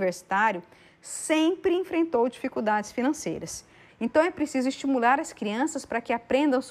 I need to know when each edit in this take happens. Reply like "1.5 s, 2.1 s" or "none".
3.9 s